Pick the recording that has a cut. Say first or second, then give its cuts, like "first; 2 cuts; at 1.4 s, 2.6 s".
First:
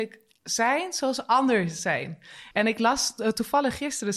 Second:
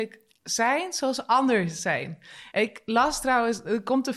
first; 1 cut; at 2.5 s